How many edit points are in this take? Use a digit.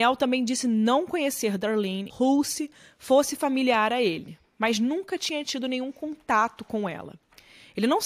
1